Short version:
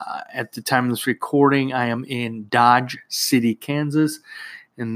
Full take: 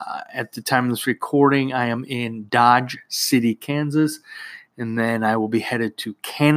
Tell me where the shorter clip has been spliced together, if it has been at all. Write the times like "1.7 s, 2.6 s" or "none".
none

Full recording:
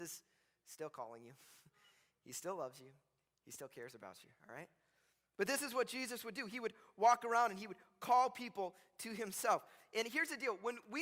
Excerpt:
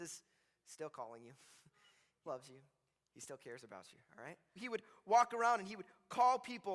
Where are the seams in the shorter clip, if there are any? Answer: 2.3 s, 4.6 s

